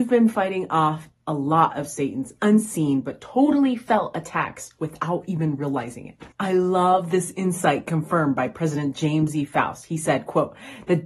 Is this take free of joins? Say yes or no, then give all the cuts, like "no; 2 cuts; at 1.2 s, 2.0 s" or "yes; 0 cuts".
no; 1 cut; at 6.3 s